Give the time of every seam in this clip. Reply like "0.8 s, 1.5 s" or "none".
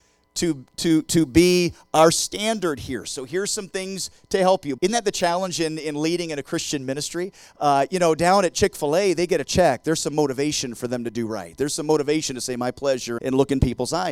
4.8 s, 13.2 s